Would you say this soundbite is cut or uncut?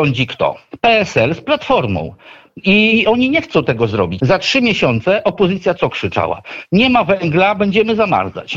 cut